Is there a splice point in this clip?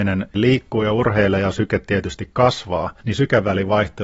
yes; 1 cut; at 3.0 s

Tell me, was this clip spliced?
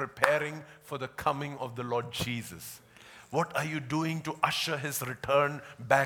no; 0 cuts

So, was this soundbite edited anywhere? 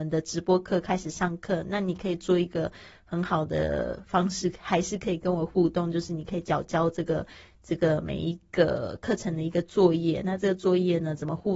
no; 0 cuts

